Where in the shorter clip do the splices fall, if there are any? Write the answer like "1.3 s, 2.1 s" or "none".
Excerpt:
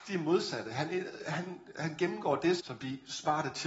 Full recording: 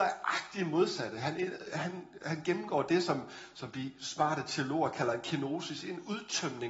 2.6 s